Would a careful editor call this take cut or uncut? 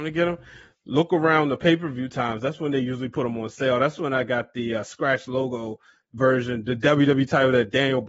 uncut